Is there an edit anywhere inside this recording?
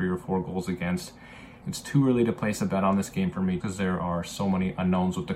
yes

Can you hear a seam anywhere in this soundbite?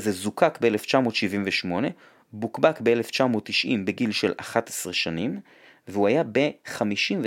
no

